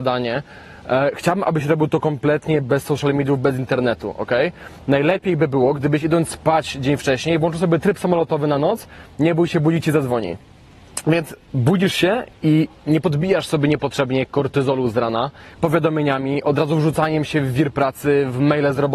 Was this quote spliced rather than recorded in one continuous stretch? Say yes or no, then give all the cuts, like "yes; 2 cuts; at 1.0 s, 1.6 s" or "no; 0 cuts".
yes; 1 cut; at 15.6 s